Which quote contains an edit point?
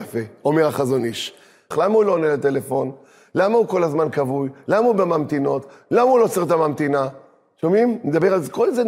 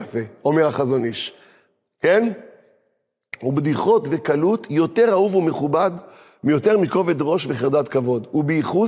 first; 1 cut; at 1.7 s

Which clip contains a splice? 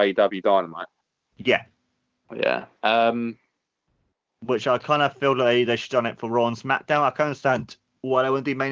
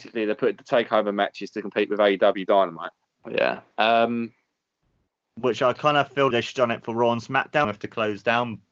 second; 3 cuts; at 3.2 s, 6.3 s, 7.6 s

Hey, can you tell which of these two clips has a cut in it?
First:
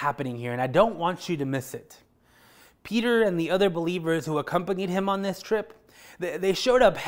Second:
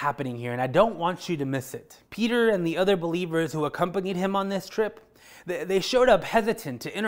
second; 1 cut; at 2.1 s

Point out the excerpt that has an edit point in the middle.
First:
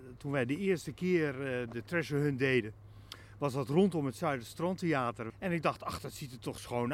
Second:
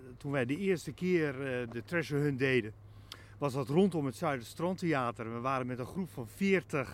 first; 1 cut; at 5.3 s

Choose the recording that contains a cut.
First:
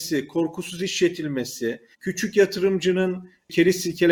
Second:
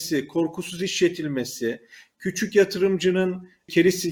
first; 1 cut; at 1.9 s

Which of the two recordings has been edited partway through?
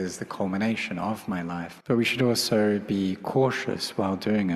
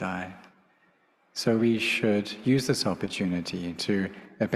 first; 1 cut; at 1.8 s

